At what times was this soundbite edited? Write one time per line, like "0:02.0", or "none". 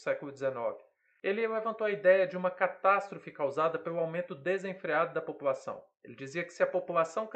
0:05.9